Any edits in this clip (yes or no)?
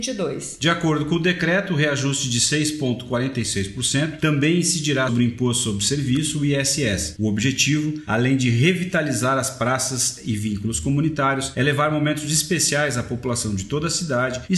yes